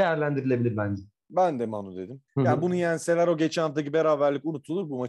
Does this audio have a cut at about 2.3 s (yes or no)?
yes